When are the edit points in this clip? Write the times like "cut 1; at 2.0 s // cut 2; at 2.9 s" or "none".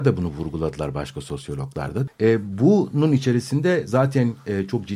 cut 1; at 2.1 s